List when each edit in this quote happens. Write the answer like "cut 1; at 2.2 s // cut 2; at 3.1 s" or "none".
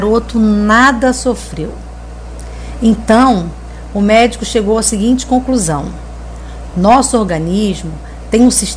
none